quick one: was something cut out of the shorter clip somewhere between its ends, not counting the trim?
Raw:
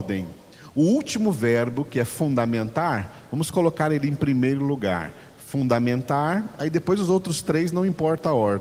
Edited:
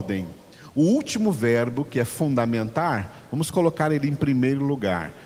no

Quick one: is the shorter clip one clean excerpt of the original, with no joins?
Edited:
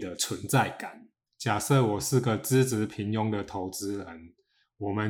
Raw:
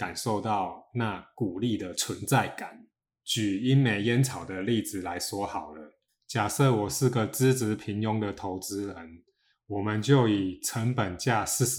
no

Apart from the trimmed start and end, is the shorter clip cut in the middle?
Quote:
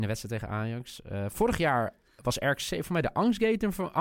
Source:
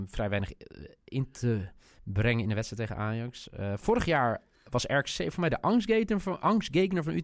no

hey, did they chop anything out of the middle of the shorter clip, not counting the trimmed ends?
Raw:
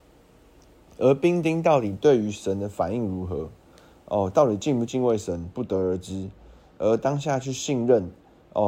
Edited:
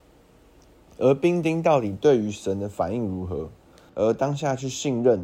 yes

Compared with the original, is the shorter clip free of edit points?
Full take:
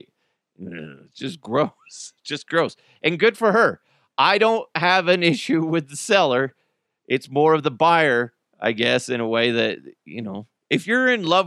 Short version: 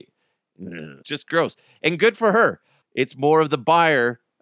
no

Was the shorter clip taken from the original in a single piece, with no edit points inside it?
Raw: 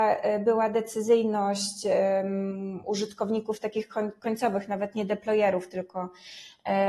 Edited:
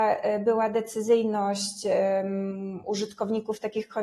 yes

